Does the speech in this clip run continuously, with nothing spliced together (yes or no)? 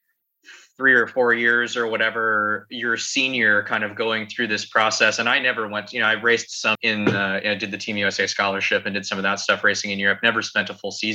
no